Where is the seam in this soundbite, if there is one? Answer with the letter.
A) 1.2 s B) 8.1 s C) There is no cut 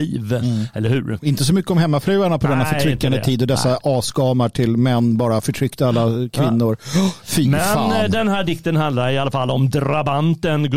A